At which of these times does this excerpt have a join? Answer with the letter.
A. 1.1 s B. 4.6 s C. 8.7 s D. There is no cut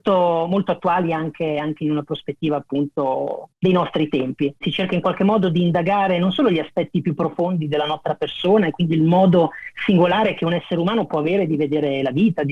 B